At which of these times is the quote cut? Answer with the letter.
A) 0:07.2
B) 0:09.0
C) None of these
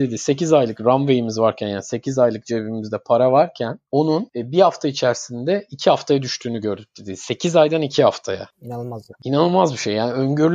C